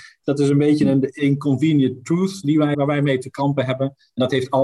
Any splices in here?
yes; 1 cut; at 2.7 s

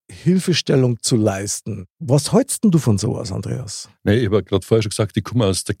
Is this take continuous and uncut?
no; 1 cut; at 1.9 s

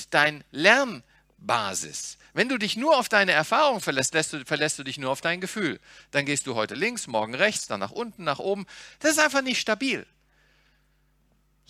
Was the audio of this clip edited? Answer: yes; 1 cut; at 7.7 s

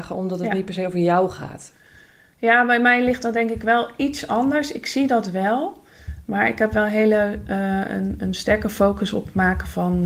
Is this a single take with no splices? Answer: yes; 0 cuts

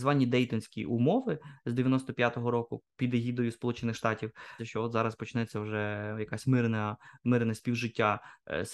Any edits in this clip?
yes; 1 cut; at 4.6 s

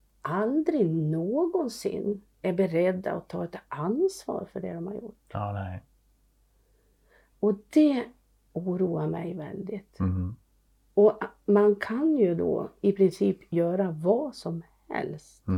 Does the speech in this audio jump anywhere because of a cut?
no; 0 cuts

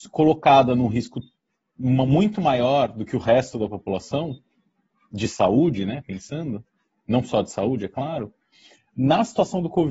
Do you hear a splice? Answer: no; 0 cuts

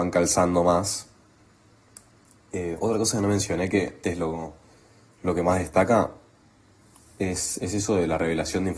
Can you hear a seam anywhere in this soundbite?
yes; 1 cut; at 4.0 s

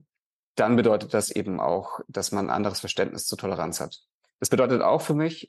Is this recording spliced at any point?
no; 0 cuts

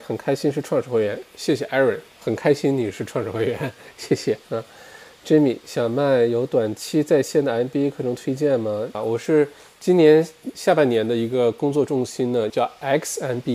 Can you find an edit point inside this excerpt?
yes; 2 cuts; at 8.9 s, 12.5 s

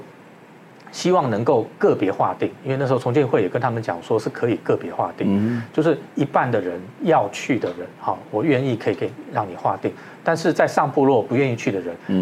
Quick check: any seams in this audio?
no; 0 cuts

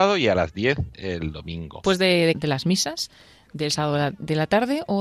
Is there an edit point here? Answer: yes; 1 cut; at 2.3 s

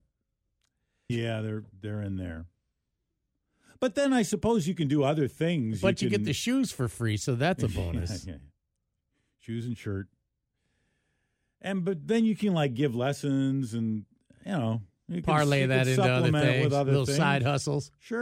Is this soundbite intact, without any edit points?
no; 1 cut; at 1.1 s

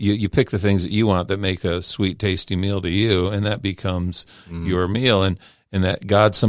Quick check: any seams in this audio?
no; 0 cuts

